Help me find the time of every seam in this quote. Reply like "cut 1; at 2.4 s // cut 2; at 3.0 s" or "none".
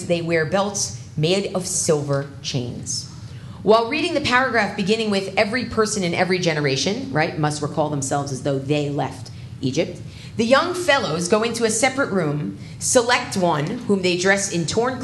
none